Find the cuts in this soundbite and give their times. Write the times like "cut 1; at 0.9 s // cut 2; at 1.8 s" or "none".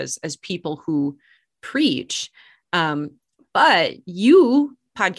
none